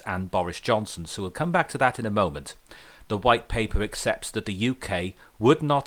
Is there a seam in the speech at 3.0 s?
yes; 1 cut; at 3.0 s

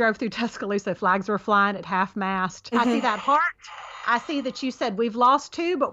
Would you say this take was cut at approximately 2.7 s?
yes; 1 cut; at 2.7 s

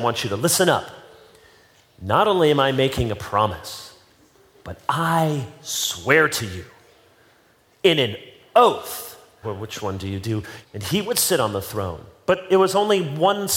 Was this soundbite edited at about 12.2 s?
no; 2 cuts; at 9.4 s, 10.6 s

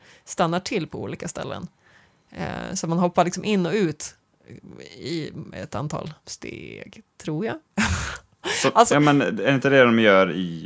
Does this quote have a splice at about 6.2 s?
yes; 1 cut; at 6.2 s

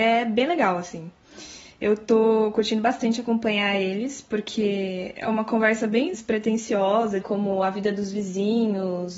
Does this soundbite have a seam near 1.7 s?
no; 2 cuts; at 6.1 s, 7.2 s

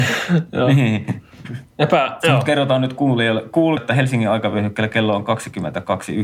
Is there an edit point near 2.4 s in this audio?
no; 1 cut; at 3.8 s

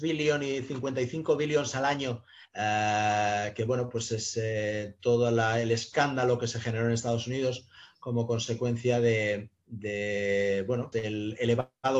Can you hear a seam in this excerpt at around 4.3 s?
no; 2 cuts; at 2.4 s, 10.9 s

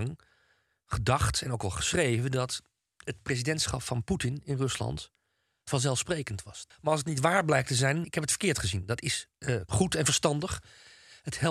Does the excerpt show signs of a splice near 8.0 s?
yes; 3 cuts; at 6.7 s, 8.0 s, 9.7 s

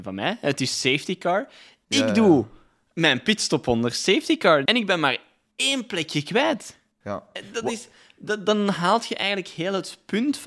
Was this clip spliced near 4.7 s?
yes; 1 cut; at 4.7 s

